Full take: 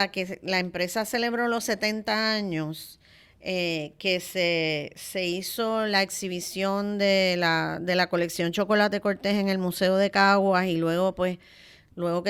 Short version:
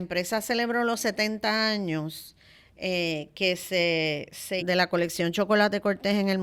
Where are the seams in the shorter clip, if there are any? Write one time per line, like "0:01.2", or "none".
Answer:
0:04.6